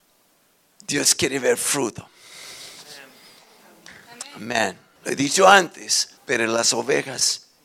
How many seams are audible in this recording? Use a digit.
2